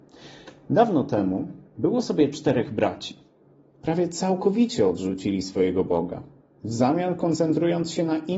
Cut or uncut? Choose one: cut